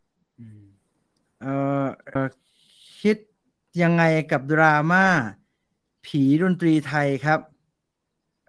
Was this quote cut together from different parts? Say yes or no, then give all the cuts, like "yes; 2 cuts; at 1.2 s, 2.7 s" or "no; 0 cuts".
yes; 1 cut; at 2.2 s